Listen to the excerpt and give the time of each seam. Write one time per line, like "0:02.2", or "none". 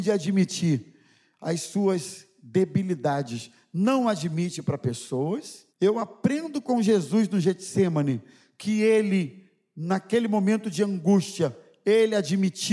0:05.7